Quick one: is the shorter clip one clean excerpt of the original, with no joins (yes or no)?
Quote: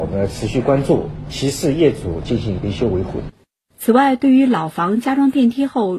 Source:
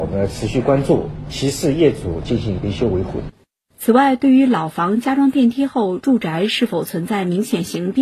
yes